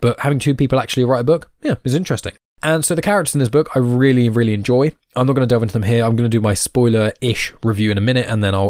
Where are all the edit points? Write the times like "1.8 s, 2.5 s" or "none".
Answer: none